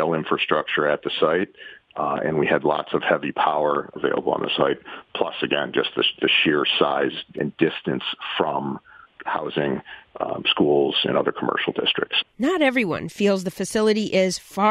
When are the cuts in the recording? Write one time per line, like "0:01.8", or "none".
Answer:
0:03.9